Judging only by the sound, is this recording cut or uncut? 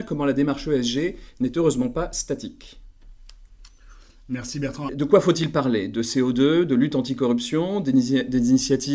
cut